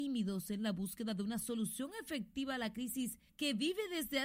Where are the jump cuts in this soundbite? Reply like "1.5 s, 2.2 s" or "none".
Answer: 3.3 s